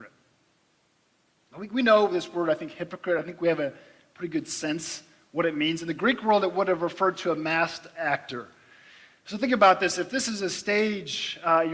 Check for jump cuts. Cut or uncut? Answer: uncut